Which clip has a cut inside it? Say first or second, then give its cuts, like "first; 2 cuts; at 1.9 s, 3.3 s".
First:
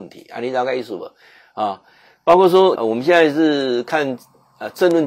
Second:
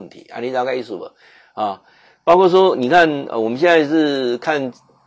first; 1 cut; at 2.8 s